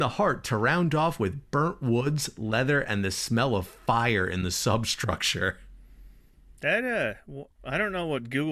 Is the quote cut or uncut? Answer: cut